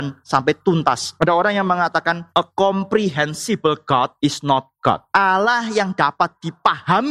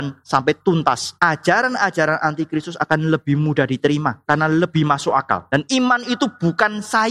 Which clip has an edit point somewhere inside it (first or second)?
second